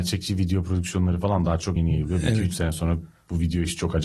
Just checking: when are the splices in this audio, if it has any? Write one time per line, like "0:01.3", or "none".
0:01.8